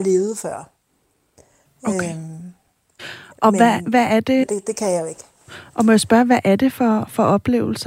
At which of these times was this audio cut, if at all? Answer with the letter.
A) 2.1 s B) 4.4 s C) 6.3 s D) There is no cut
B